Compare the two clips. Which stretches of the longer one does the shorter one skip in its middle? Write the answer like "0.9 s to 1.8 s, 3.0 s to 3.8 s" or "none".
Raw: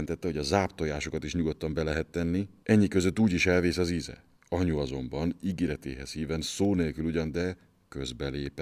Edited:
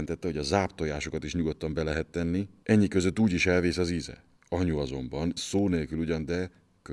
5.4 s to 6.4 s